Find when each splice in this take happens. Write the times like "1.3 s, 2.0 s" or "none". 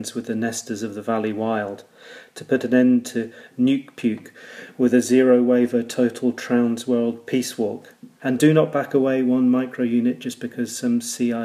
8.2 s